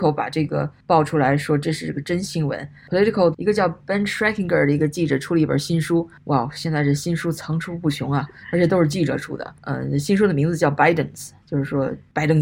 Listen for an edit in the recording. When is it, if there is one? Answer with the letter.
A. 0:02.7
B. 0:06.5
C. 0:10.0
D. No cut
D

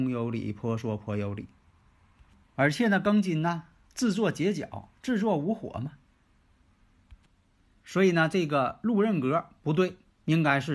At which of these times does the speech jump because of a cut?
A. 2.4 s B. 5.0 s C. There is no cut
A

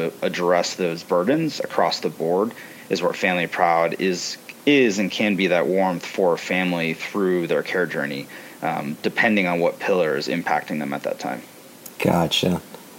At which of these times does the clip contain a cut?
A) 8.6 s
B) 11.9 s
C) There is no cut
C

